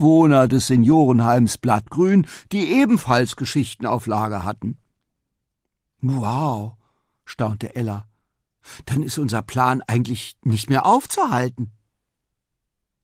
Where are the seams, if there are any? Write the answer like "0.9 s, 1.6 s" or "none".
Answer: none